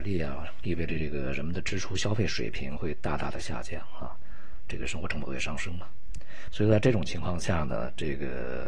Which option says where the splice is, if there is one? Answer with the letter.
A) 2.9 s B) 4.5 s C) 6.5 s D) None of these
D